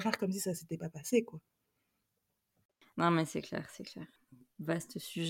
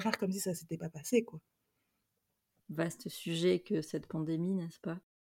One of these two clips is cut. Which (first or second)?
second